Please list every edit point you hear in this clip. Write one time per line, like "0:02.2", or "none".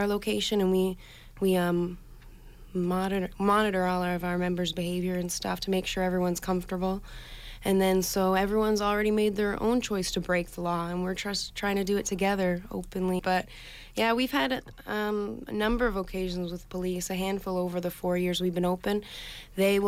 0:13.2